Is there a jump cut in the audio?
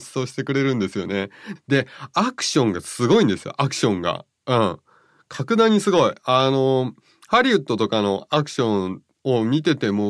yes; 1 cut; at 1.6 s

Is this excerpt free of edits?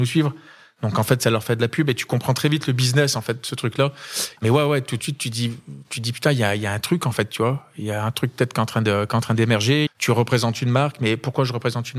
no; 2 cuts; at 4.4 s, 9.9 s

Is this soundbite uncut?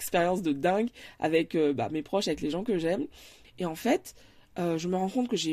no; 1 cut; at 3.4 s

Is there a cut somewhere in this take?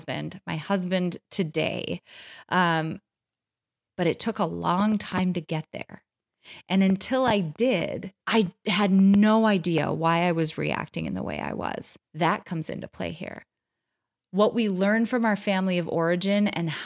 yes; 3 cuts; at 3.9 s, 8.2 s, 12.0 s

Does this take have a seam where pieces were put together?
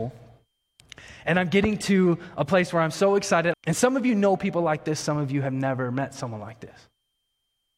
yes; 2 cuts; at 3.5 s, 5.0 s

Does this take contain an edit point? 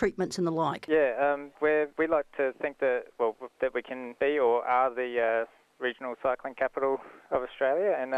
no; 0 cuts

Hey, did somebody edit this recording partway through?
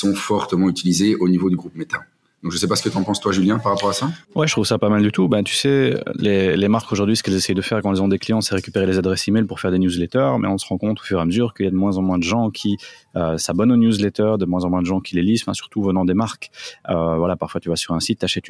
yes; 1 cut; at 4.2 s

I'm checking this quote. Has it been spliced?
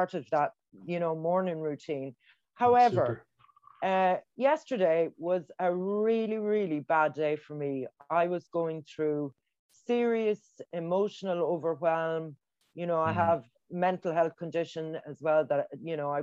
no; 0 cuts

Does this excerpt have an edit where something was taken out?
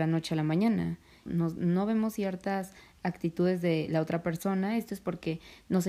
yes; 1 cut; at 1.3 s

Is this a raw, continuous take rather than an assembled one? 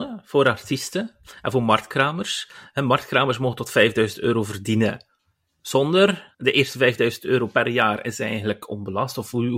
no; 1 cut; at 6.3 s

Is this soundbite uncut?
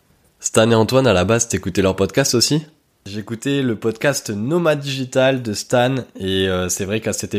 yes; 0 cuts

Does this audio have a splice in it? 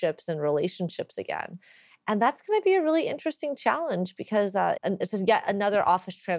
yes; 1 cut; at 4.8 s

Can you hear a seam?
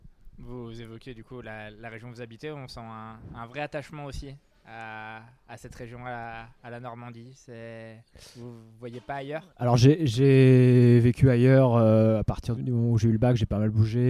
yes; 2 cuts; at 9.5 s, 12.6 s

